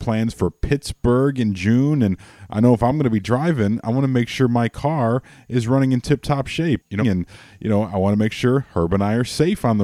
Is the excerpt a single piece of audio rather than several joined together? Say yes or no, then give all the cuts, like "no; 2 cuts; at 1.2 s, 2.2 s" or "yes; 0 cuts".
no; 1 cut; at 7.0 s